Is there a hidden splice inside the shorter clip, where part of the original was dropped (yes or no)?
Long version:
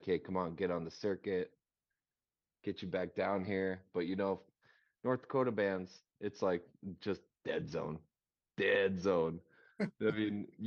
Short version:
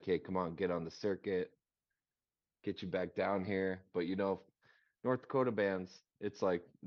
no